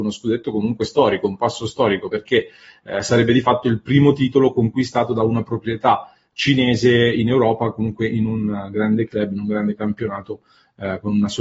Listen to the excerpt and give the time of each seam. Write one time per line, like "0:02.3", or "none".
none